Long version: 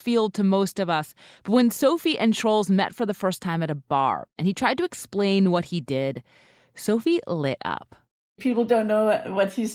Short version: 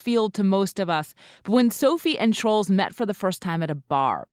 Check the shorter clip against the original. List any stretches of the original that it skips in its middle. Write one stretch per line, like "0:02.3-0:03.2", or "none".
none